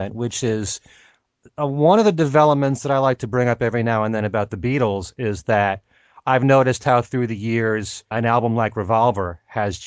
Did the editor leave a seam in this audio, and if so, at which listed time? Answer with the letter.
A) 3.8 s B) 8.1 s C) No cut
B